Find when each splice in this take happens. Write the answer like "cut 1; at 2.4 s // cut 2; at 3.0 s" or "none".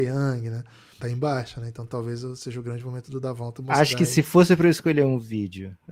cut 1; at 1.0 s